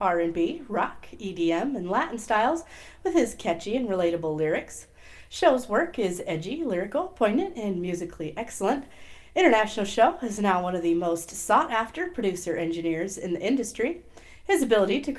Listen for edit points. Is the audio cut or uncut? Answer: uncut